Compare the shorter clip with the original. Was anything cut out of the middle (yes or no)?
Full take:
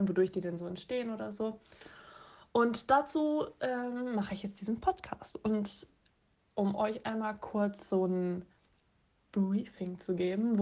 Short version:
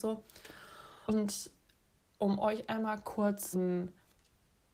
yes